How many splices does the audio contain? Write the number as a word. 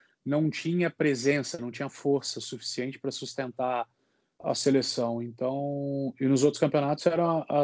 zero